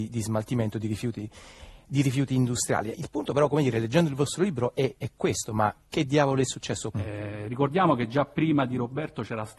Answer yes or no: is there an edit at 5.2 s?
no